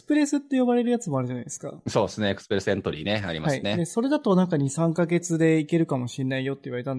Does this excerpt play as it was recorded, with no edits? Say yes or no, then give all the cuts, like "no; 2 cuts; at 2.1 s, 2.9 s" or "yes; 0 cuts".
yes; 0 cuts